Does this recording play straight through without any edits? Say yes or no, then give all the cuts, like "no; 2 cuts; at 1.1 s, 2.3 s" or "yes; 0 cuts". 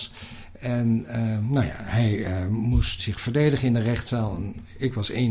no; 1 cut; at 3.0 s